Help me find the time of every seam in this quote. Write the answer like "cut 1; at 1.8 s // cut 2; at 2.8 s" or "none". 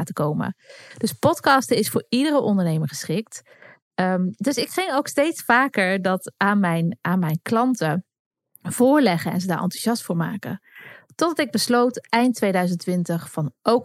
none